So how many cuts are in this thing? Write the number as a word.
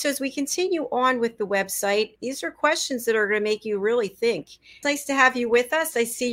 two